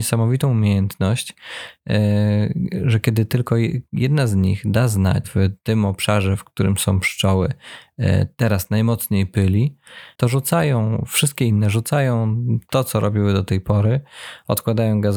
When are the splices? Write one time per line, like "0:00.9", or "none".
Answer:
0:05.2